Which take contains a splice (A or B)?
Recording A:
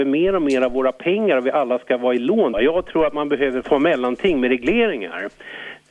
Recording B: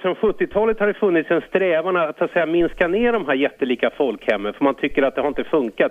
A